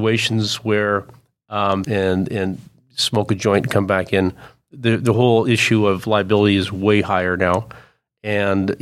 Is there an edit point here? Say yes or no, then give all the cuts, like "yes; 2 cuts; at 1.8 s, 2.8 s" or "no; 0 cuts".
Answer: yes; 1 cut; at 1.8 s